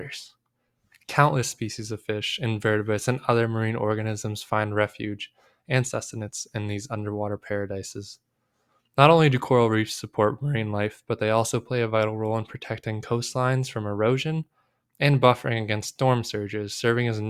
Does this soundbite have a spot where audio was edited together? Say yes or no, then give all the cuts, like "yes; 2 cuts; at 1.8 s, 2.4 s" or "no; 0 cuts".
yes; 1 cut; at 1.0 s